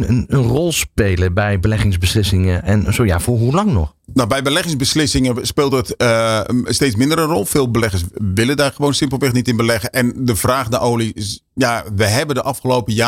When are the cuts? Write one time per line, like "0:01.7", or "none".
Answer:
none